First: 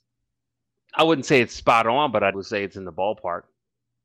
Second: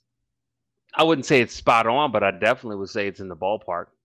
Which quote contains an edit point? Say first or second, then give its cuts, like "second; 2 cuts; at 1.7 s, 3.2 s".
first; 1 cut; at 2.3 s